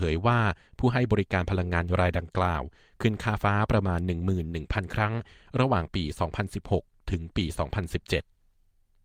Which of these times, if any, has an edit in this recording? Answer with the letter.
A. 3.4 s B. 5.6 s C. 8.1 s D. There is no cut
A